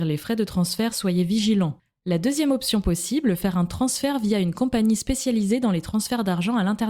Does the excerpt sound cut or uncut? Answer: cut